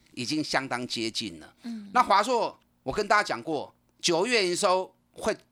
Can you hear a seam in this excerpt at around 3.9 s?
no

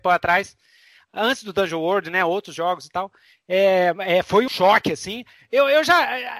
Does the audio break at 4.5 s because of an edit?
yes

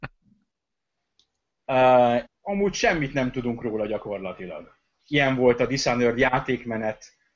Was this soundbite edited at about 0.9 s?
no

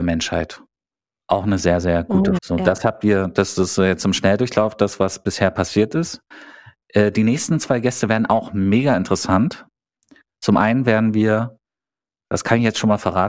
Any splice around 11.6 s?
no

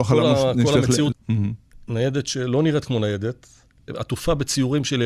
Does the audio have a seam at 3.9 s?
yes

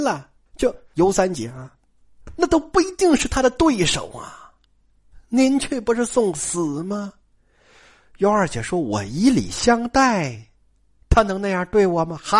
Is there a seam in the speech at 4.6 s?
no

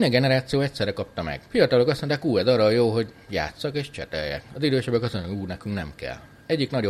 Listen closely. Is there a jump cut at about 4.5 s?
no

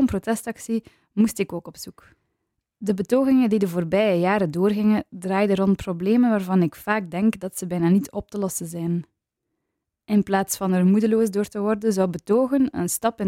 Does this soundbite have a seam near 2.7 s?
no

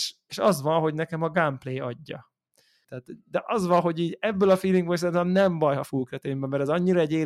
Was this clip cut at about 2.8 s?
yes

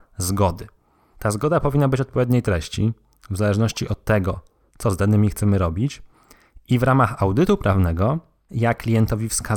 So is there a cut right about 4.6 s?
no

